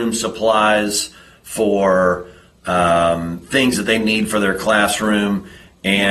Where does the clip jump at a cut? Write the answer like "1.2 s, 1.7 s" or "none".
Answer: none